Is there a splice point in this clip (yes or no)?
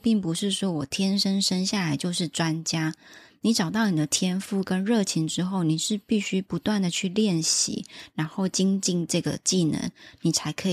no